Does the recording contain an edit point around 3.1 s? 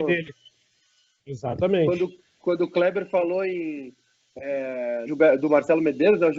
no; 2 cuts; at 1.2 s, 5.1 s

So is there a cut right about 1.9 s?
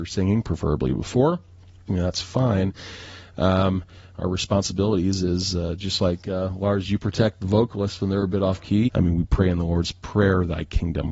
yes; 3 cuts; at 1.9 s, 4.1 s, 8.9 s

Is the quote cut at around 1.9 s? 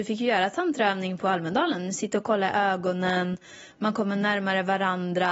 no; 0 cuts

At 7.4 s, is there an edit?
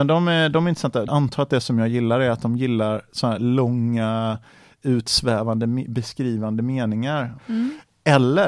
yes; 2 cuts; at 1.1 s, 7.4 s

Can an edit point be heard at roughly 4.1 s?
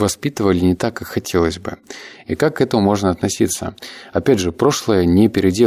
no; 1 cut; at 2.2 s

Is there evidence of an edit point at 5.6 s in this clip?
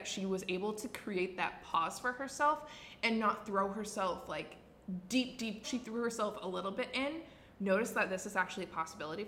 yes; 1 cut; at 5.6 s

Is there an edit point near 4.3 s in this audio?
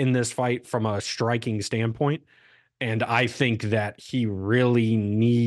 no; 0 cuts

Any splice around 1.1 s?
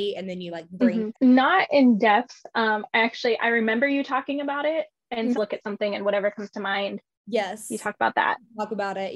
yes; 2 cuts; at 1.1 s, 5.3 s

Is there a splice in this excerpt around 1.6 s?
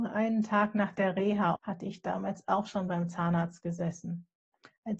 yes; 1 cut; at 1.6 s

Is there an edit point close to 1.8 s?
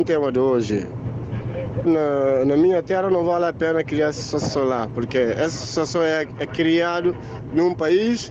yes; 1 cut; at 1.8 s

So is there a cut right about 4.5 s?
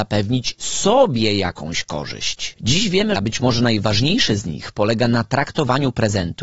no; 1 cut; at 3.2 s

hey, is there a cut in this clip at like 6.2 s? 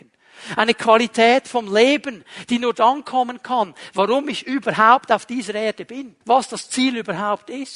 yes; 2 cuts; at 3.9 s, 6.2 s

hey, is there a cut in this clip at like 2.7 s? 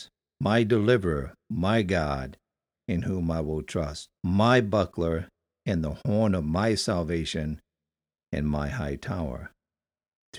yes; 2 cuts; at 2.7 s, 4.2 s

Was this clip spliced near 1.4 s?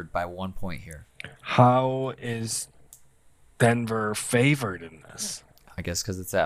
no; 0 cuts

